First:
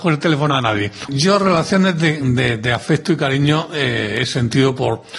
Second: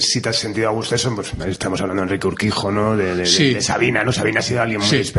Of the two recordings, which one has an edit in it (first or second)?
first